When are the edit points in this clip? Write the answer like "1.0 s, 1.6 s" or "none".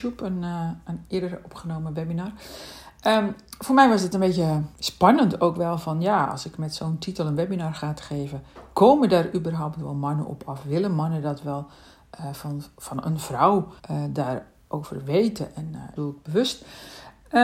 4.7 s, 13.8 s, 16.0 s